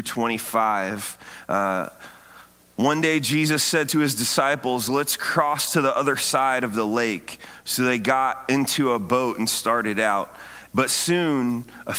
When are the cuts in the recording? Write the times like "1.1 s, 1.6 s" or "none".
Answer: 10.7 s

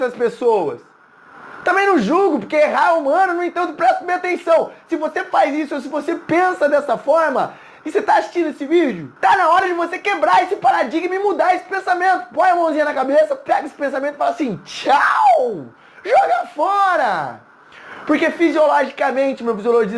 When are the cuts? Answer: 9.2 s

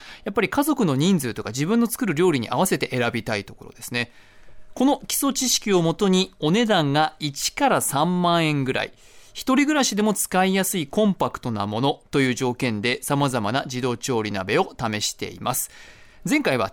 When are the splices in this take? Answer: none

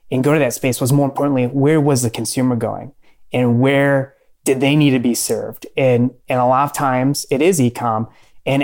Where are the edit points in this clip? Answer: none

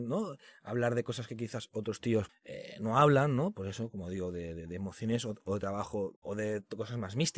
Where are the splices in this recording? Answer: 2.3 s, 6.2 s

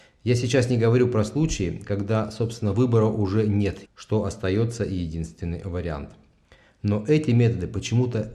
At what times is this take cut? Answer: 3.8 s

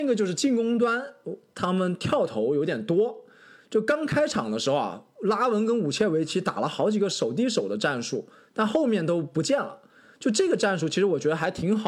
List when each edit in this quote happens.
none

